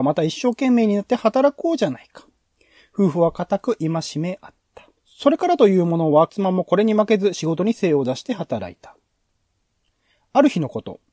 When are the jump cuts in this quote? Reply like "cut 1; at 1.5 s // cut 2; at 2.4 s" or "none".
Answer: cut 1; at 5.0 s // cut 2; at 6.3 s